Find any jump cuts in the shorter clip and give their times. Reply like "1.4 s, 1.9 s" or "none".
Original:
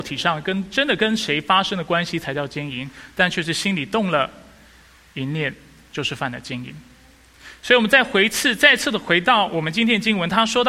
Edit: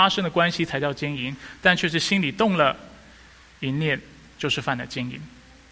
none